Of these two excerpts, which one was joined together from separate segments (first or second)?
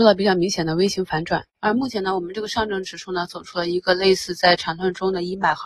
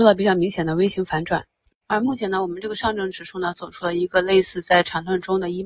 first